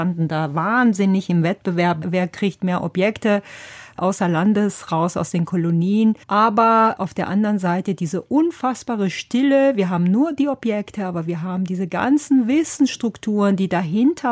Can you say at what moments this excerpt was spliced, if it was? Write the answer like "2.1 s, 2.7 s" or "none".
6.2 s